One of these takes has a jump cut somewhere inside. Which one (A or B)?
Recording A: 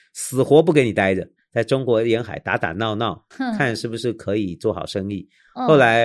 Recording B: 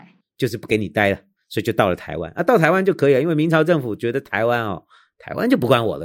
A